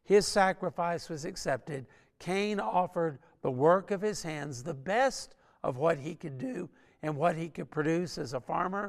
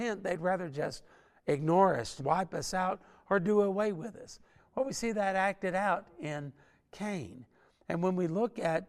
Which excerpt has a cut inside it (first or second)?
second